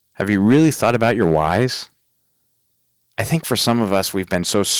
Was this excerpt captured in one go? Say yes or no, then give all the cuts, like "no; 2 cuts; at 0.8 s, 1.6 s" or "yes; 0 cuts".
yes; 0 cuts